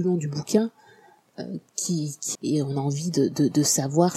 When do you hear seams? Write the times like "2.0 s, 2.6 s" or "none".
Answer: 2.4 s